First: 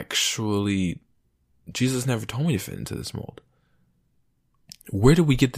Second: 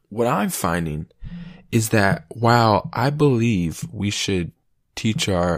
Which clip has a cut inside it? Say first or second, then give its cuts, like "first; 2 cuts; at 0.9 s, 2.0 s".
first; 1 cut; at 4.7 s